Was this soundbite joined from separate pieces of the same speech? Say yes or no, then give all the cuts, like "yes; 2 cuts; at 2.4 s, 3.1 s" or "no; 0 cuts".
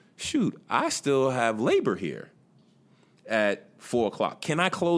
no; 0 cuts